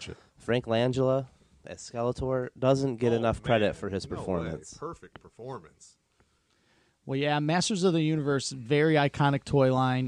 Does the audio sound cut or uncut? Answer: uncut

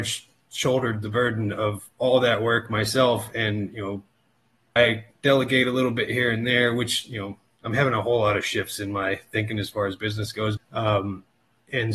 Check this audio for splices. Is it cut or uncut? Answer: cut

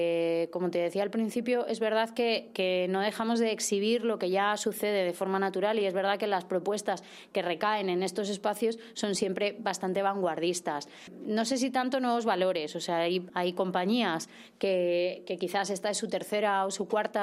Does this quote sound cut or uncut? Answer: cut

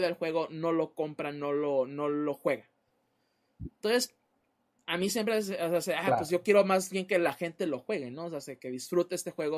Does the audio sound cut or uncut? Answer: uncut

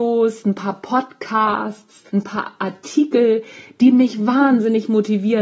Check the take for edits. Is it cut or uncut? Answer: cut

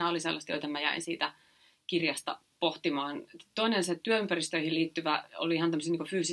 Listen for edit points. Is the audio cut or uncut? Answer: uncut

